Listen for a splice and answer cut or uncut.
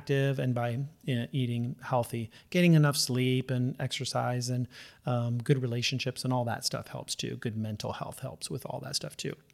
uncut